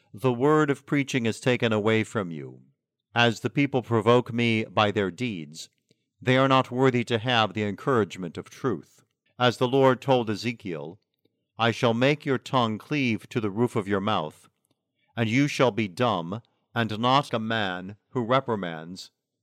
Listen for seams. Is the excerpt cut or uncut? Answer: cut